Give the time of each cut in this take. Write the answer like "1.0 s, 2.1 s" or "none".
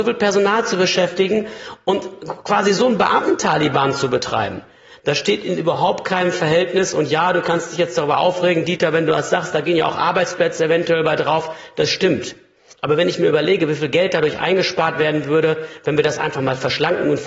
none

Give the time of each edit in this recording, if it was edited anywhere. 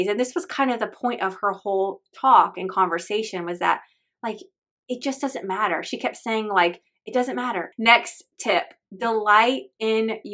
7.7 s

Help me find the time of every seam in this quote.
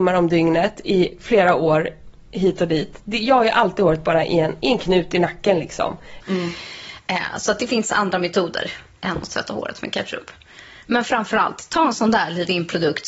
6.2 s

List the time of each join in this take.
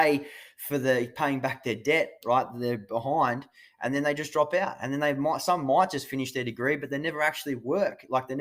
none

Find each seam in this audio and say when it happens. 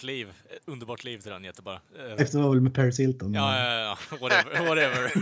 2.2 s

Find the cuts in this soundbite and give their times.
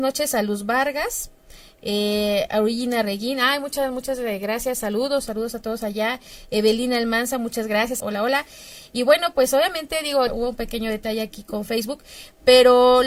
8.0 s, 10.3 s

